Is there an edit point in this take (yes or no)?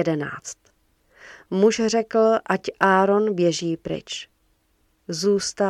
no